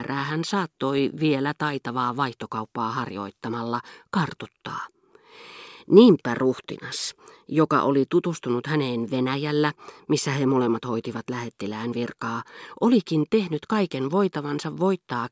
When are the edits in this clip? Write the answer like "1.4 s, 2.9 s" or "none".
none